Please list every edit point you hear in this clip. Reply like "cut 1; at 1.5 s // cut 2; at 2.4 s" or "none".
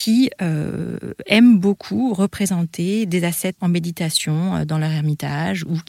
cut 1; at 3.6 s